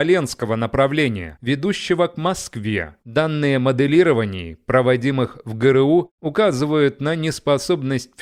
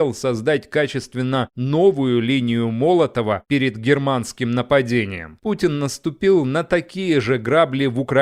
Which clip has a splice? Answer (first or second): first